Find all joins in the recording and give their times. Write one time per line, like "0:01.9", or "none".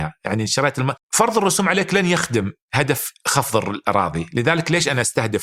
0:01.0
0:02.6